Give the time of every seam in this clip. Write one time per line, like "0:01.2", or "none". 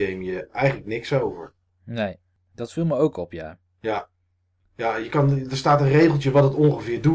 none